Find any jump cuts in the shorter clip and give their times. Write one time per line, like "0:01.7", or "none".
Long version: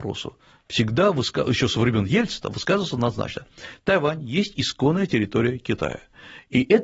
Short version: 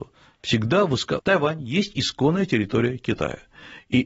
0:01.2